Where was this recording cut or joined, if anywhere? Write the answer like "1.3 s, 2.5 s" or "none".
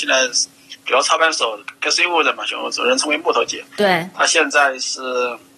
none

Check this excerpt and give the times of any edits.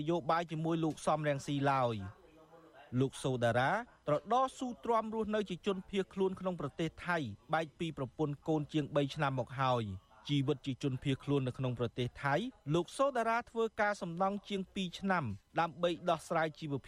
2.9 s

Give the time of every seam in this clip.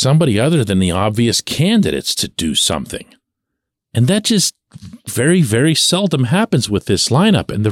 5.1 s

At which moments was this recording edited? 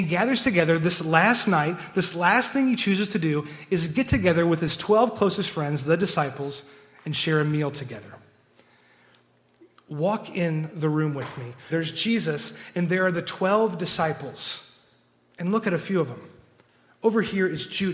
11.7 s

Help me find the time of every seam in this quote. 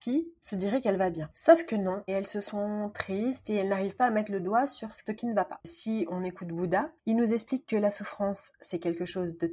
2.1 s, 7.0 s

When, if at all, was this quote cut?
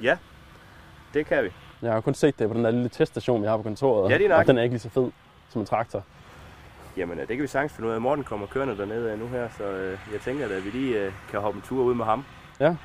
none

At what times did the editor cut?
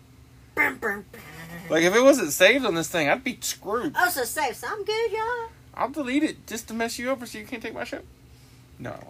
none

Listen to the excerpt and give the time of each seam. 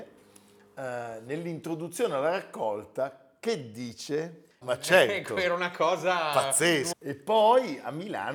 4.6 s, 6.9 s

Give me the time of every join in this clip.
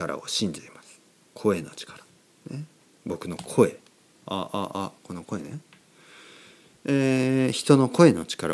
none

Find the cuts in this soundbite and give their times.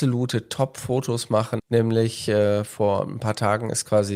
1.6 s

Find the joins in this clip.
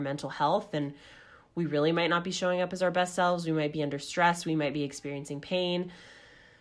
none

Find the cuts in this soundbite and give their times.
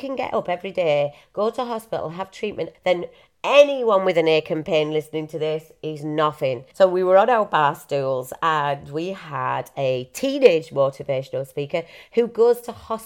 2.7 s, 6.7 s

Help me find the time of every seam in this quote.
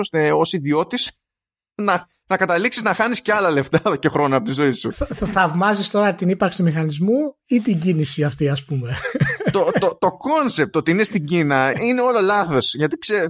11.7 s

